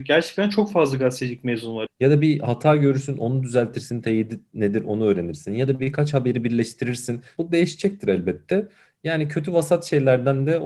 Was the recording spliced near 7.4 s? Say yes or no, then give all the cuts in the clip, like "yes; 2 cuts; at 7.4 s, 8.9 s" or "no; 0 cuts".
yes; 3 cuts; at 1.9 s, 7.4 s, 8.9 s